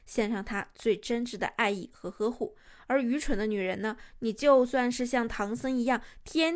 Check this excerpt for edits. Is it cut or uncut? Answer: uncut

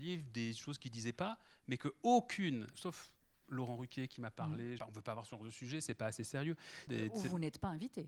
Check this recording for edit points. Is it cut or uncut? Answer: cut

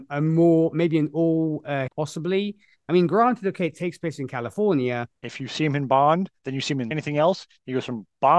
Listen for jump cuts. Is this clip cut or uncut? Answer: cut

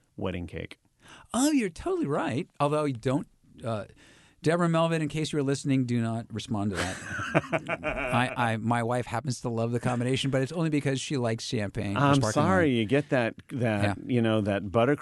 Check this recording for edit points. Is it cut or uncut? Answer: uncut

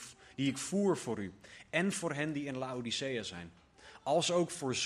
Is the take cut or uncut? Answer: uncut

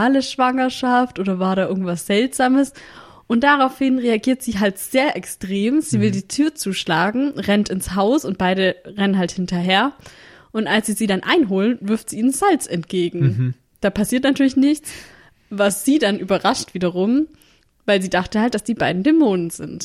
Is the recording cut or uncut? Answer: uncut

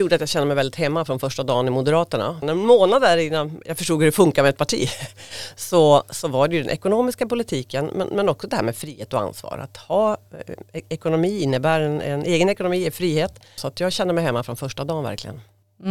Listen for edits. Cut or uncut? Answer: cut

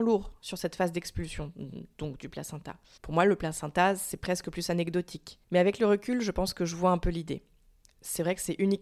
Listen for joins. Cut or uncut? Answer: cut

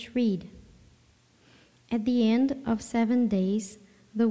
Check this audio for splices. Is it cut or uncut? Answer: uncut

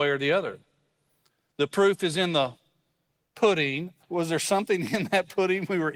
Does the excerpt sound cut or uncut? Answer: cut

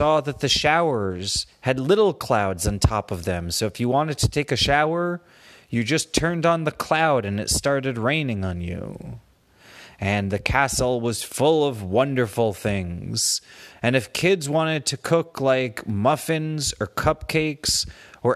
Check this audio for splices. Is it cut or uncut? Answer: cut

